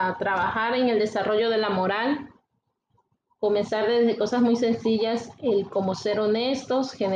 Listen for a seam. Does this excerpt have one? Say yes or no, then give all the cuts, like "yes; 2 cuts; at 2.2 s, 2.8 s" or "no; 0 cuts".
no; 0 cuts